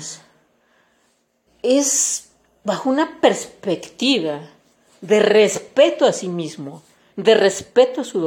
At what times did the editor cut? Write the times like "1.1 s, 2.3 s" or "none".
1.5 s, 7.1 s